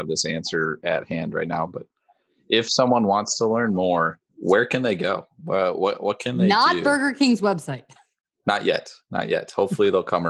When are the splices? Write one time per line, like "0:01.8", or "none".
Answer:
0:04.3